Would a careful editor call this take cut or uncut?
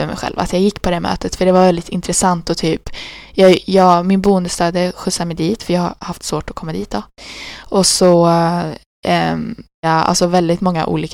cut